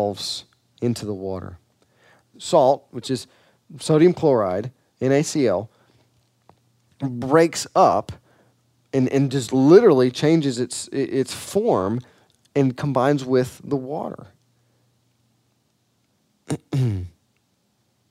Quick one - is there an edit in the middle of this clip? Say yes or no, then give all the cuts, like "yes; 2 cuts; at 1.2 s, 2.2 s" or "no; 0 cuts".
yes; 1 cut; at 2.3 s